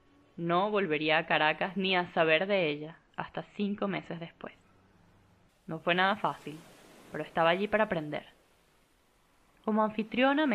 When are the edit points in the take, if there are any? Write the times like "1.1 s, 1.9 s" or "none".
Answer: 5.5 s